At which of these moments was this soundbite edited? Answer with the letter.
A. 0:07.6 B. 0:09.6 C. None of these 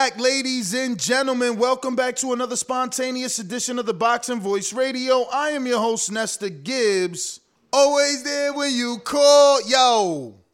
A